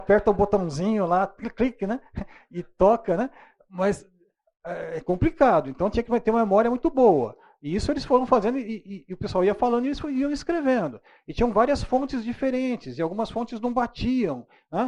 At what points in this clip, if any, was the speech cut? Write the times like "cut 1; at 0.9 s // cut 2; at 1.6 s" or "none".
none